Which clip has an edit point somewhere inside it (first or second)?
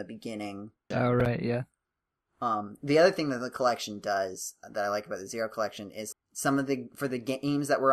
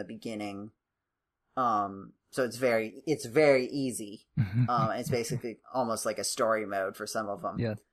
first